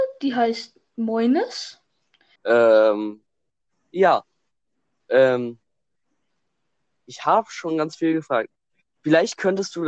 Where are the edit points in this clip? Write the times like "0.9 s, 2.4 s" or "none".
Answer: 2.4 s